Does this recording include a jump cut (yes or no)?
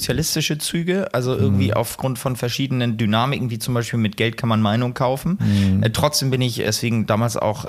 yes